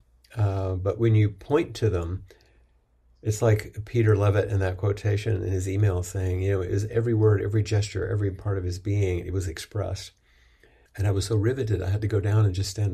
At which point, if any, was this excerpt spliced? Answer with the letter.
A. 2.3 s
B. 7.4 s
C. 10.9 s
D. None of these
C